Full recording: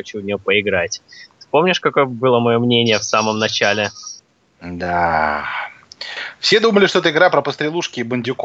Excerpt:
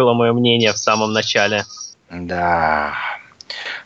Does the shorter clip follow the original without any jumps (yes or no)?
no